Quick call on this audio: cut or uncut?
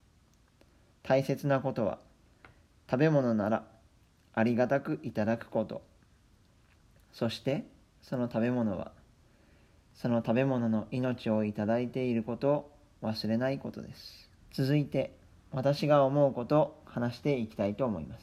cut